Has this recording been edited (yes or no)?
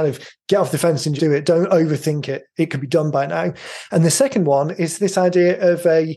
yes